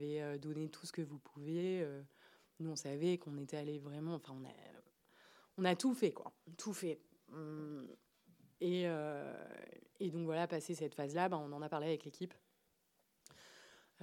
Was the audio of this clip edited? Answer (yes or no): no